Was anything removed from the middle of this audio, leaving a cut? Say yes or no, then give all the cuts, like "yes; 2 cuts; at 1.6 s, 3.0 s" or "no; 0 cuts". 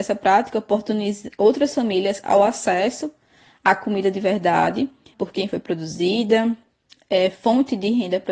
yes; 2 cuts; at 1.3 s, 5.1 s